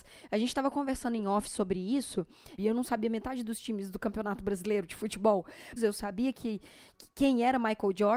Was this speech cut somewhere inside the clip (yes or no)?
yes